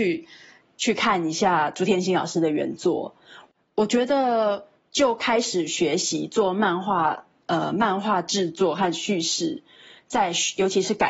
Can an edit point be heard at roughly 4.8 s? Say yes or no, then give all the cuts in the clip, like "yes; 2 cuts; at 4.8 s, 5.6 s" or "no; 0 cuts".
yes; 1 cut; at 4.8 s